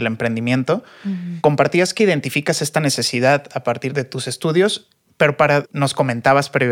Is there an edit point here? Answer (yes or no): yes